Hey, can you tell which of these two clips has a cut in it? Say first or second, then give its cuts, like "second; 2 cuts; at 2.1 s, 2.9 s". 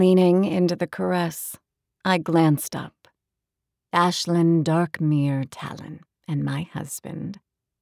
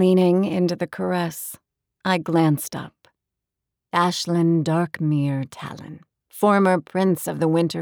first; 1 cut; at 6.1 s